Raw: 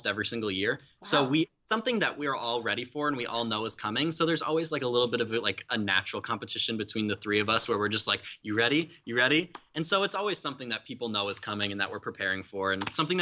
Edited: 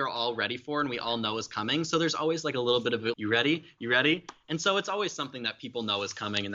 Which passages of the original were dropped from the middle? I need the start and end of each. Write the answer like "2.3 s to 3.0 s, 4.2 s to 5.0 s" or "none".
5.4 s to 8.4 s